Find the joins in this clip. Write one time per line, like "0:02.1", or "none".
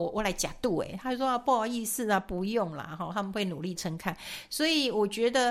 0:03.8